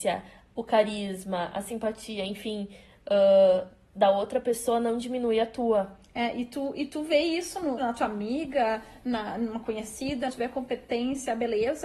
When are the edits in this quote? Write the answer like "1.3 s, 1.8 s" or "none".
7.8 s, 10.3 s